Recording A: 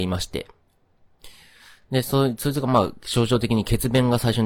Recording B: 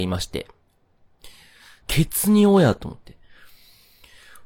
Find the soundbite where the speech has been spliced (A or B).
B